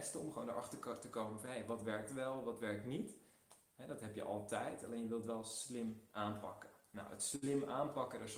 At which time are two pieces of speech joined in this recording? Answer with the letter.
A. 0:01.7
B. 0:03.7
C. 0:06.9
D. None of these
D